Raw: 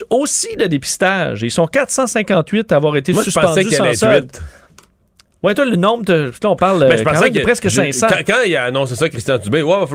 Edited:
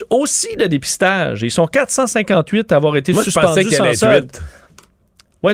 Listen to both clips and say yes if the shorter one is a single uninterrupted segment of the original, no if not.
yes